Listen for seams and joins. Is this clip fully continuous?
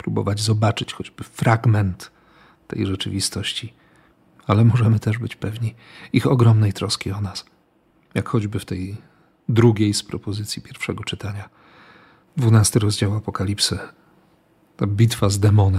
yes; 0 cuts

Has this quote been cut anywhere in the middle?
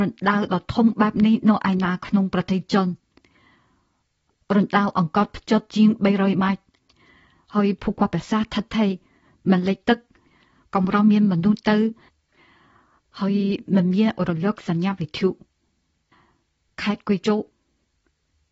no; 0 cuts

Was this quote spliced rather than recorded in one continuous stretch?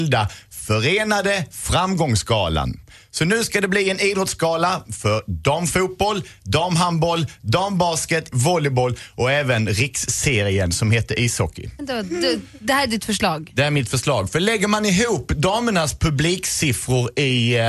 yes; 2 cuts; at 8.3 s, 11.8 s

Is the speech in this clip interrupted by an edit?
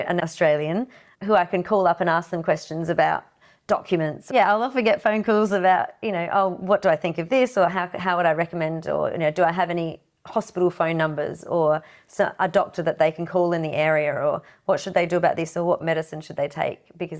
no; 0 cuts

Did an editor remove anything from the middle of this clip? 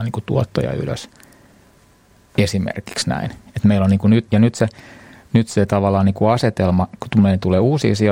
yes; 1 cut; at 4.3 s

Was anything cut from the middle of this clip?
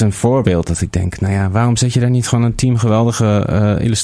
no; 0 cuts

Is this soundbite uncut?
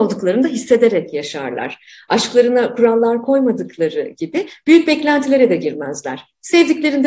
yes; 0 cuts

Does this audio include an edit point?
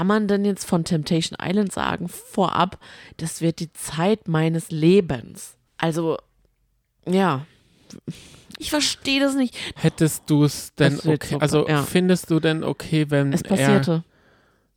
yes; 3 cuts; at 5.7 s, 8.6 s, 9.8 s

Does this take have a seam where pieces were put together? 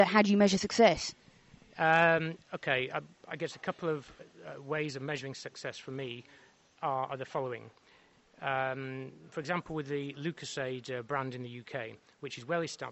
no; 0 cuts

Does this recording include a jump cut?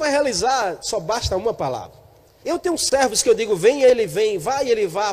yes; 1 cut; at 2.4 s

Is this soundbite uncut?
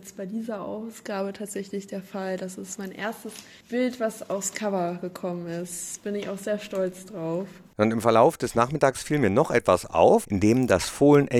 no; 1 cut; at 10.2 s

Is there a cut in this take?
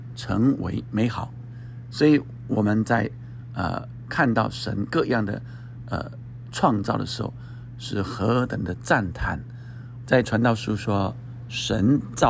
yes; 1 cut; at 10.1 s

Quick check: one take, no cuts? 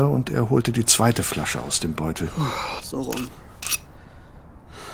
no; 1 cut; at 2.8 s

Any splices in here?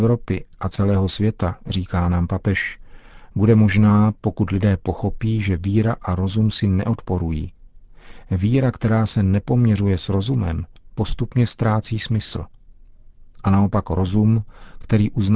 no; 0 cuts

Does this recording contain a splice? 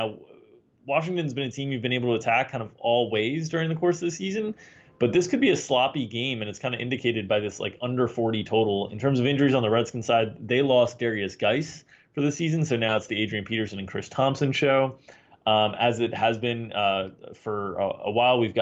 no; 0 cuts

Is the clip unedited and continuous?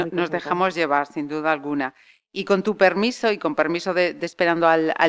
yes; 0 cuts

